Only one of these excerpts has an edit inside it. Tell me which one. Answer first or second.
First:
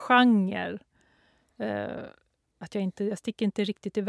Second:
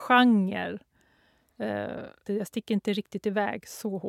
second